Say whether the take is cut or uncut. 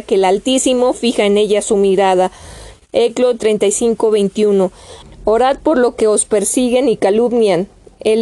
cut